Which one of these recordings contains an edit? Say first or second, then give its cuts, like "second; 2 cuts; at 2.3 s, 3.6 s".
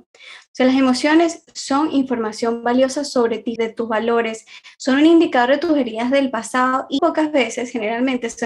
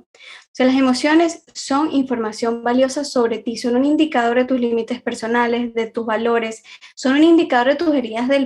first; 2 cuts; at 3.6 s, 7.0 s